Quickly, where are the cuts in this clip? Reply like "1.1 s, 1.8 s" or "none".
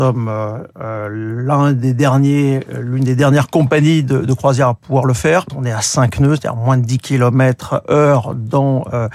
5.5 s